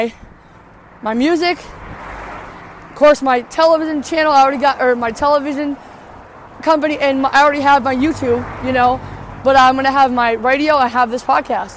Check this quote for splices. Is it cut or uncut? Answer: uncut